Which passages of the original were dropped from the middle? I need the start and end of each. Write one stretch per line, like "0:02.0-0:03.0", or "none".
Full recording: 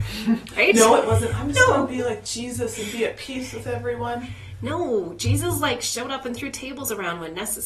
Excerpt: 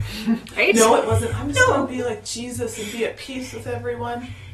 none